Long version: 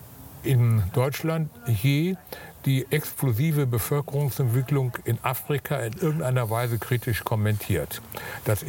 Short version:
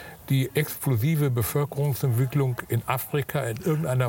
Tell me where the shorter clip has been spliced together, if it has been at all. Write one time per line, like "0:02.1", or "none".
none